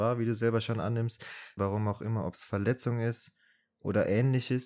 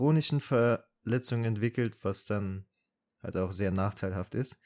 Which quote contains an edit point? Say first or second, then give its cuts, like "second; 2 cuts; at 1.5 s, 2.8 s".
first; 1 cut; at 1.6 s